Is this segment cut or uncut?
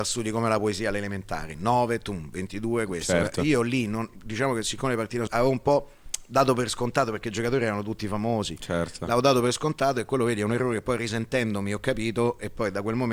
cut